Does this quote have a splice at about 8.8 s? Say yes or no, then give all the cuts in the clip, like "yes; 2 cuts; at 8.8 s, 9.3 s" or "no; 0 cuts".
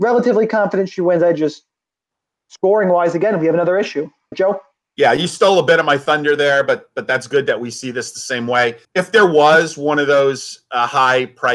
yes; 2 cuts; at 4.3 s, 8.8 s